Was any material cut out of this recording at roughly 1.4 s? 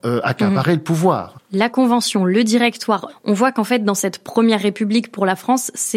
no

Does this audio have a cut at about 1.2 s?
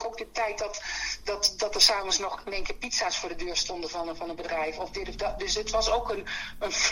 no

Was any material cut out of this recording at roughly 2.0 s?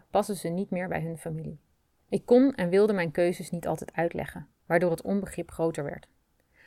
yes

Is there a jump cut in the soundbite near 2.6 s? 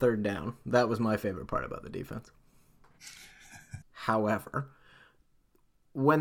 no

